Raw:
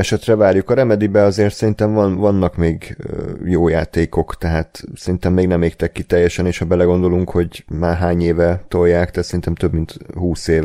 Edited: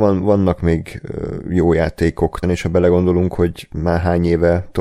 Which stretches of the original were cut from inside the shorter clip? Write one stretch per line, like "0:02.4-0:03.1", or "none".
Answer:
0:04.4-0:06.4